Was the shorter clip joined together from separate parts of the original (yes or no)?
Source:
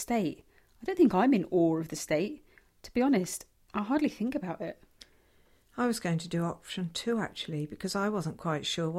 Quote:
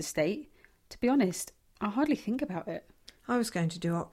yes